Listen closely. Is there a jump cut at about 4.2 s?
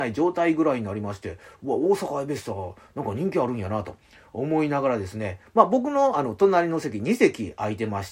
no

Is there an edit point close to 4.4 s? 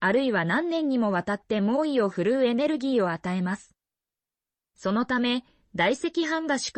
no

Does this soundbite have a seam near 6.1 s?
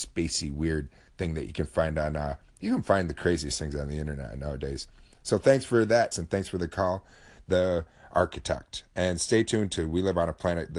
yes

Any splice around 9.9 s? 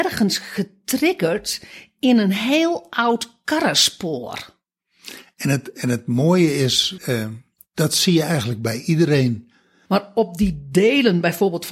yes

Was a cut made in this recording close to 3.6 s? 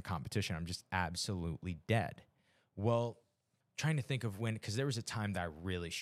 yes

